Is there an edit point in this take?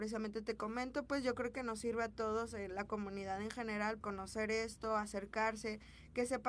yes; 2 cuts; at 1.1 s, 4.0 s

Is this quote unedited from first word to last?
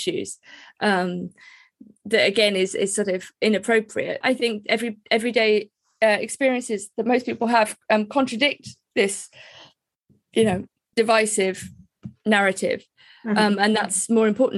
no; 2 cuts; at 4.2 s, 10.9 s

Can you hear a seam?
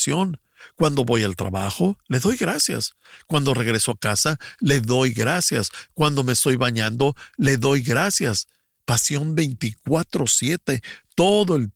yes; 1 cut; at 8.8 s

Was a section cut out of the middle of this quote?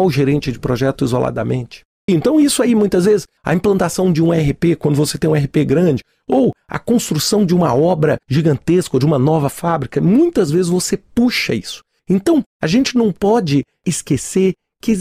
yes; 1 cut; at 2.1 s

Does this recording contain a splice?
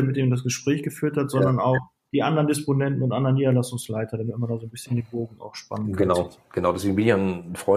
no; 0 cuts

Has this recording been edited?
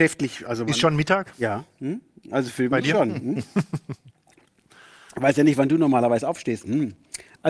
no; 0 cuts

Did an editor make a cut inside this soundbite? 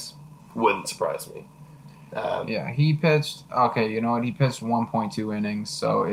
no; 0 cuts

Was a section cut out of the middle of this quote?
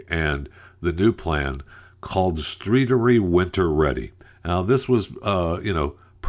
no; 0 cuts

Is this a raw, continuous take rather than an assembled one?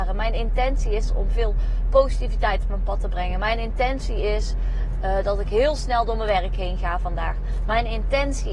yes; 0 cuts

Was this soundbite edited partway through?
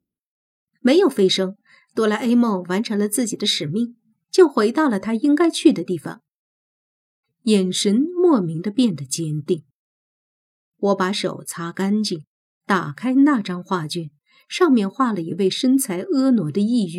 yes; 1 cut; at 7.2 s

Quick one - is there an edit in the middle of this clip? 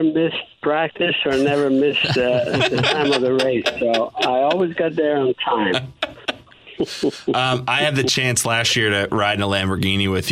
no; 0 cuts

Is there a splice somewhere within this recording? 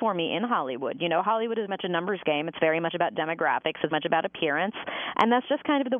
yes; 2 cuts; at 1.7 s, 3.9 s

